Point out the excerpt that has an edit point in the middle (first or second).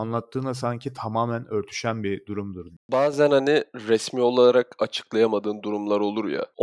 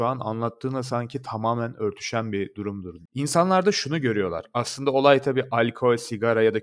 second